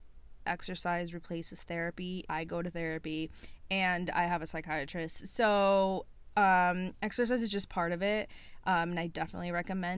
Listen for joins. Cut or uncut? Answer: cut